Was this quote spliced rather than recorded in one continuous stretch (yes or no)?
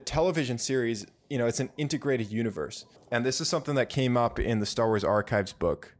yes